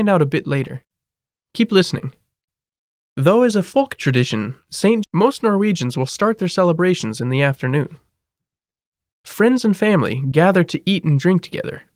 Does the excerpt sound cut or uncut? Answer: cut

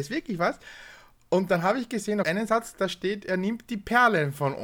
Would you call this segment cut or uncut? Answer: cut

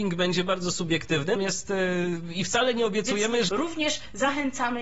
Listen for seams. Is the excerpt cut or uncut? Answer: cut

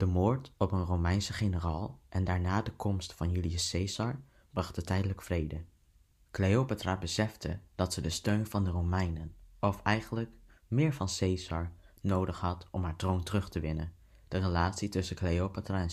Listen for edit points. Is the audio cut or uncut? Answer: uncut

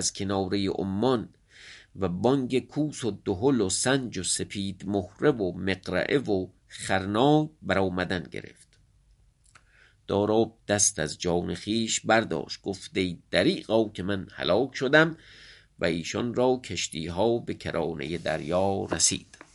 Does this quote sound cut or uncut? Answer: uncut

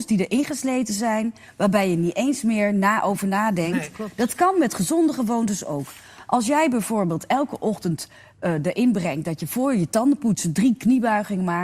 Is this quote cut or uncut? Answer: uncut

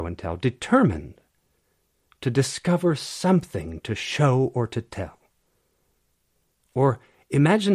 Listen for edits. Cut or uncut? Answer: uncut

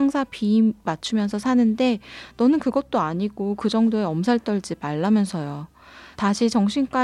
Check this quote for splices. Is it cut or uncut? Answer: cut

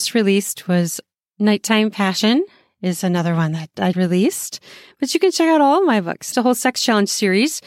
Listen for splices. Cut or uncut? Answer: cut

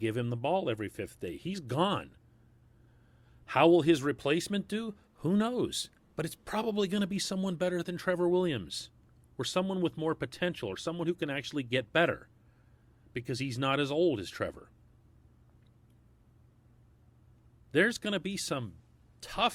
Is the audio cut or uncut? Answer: uncut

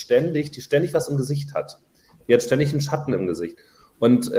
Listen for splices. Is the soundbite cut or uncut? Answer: uncut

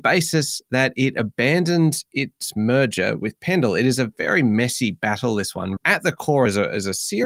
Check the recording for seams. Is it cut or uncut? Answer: cut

